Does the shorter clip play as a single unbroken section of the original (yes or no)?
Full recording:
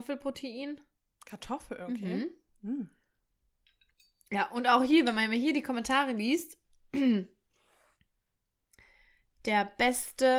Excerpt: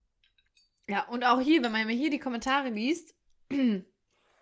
yes